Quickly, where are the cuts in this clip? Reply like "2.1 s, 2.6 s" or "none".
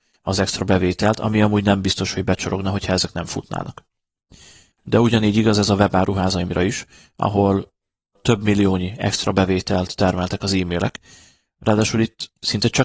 4.7 s